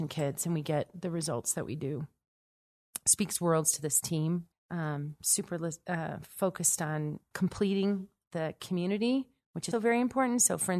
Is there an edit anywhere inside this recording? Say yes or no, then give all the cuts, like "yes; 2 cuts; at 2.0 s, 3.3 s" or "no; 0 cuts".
yes; 3 cuts; at 4.5 s, 7.3 s, 9.7 s